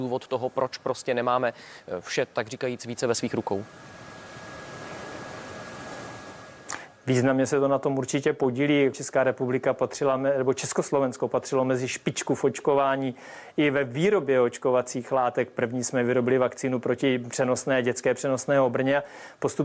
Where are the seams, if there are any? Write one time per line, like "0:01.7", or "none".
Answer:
0:08.9